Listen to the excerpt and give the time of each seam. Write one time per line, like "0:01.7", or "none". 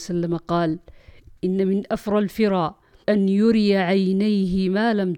0:03.0